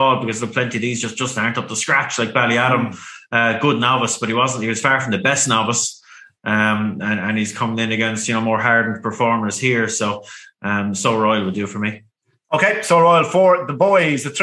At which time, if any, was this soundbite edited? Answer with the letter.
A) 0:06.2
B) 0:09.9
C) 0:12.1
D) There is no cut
D